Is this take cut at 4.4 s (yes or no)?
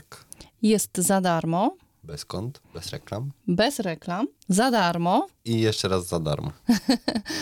yes